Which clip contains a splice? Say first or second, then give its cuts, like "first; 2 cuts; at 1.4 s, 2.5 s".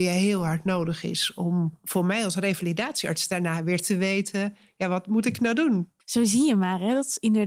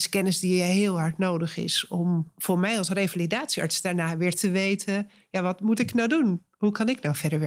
first; 1 cut; at 6.0 s